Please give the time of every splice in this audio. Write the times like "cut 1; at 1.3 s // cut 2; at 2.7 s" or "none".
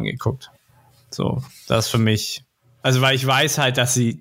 none